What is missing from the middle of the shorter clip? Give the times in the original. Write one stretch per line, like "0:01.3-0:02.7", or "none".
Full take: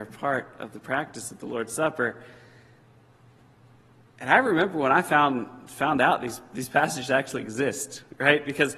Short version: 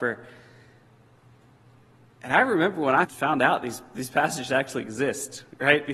0:05.0-0:05.6